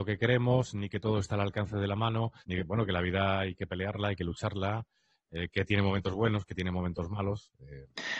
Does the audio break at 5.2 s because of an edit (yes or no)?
no